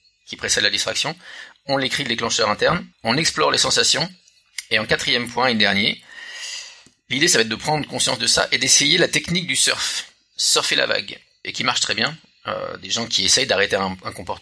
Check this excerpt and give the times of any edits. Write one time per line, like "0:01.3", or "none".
0:02.9
0:11.4